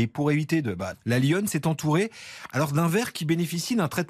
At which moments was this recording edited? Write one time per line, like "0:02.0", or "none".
0:00.9